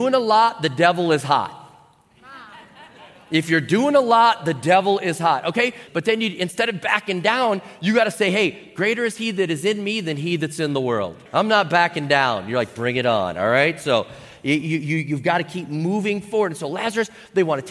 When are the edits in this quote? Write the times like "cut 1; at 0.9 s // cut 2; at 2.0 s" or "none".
cut 1; at 5.9 s // cut 2; at 11.3 s